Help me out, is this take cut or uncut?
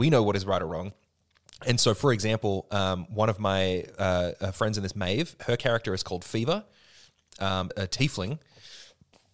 cut